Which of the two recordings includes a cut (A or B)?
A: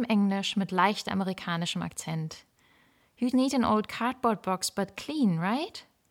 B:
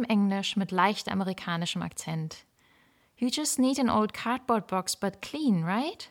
A